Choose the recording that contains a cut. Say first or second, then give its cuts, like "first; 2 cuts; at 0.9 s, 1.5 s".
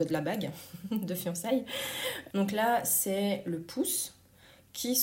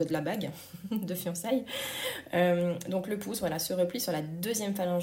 first; 1 cut; at 2.3 s